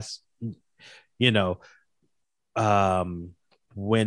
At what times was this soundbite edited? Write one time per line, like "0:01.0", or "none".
none